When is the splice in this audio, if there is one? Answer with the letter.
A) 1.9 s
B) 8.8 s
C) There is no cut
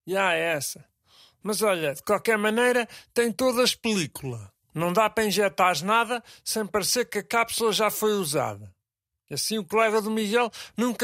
C